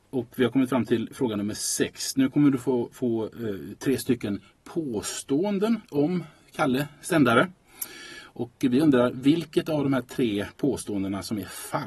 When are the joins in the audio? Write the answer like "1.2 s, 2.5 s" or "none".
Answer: none